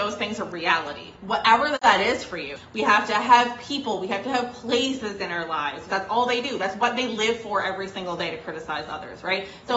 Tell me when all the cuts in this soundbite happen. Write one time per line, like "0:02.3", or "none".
0:02.6
0:05.9